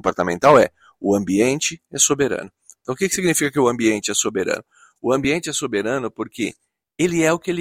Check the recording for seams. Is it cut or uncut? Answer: uncut